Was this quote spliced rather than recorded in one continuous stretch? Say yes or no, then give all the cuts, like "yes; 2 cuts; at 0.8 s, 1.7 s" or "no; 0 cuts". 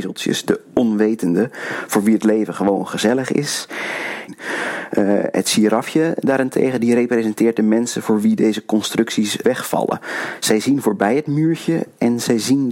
yes; 2 cuts; at 4.3 s, 9.4 s